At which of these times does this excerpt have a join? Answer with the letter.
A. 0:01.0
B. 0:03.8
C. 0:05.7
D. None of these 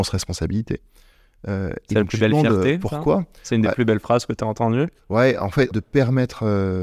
C